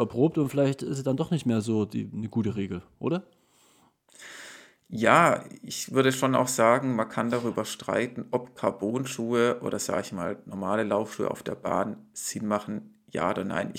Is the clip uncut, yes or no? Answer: yes